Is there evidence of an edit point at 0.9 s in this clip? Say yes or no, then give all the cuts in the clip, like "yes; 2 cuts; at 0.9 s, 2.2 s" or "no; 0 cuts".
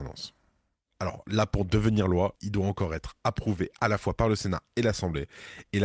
no; 1 cut; at 2.4 s